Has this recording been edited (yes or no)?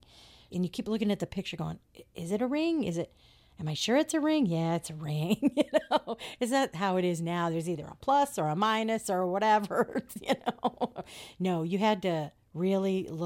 no